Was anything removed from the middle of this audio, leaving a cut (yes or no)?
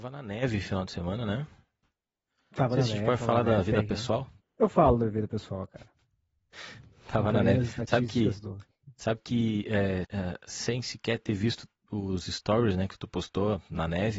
yes